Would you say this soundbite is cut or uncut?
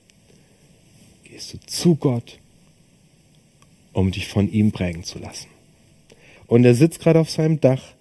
cut